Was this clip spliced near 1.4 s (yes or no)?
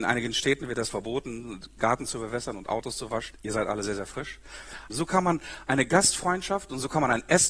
no